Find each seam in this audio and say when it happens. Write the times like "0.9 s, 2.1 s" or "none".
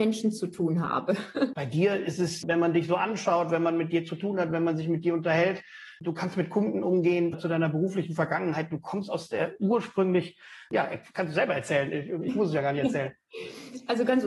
1.5 s, 7.3 s